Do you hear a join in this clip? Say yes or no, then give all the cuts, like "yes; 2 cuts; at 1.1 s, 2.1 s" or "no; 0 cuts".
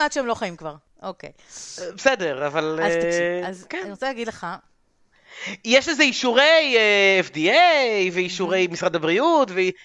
no; 0 cuts